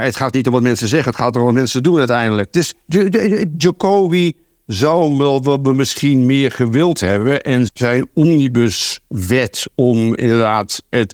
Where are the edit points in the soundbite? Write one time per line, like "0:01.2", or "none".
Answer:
0:07.7